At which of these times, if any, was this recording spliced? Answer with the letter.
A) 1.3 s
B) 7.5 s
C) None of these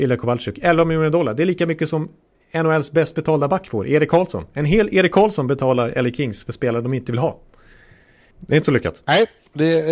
C